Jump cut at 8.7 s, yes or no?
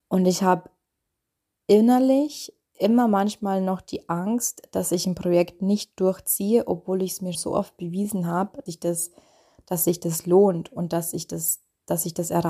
yes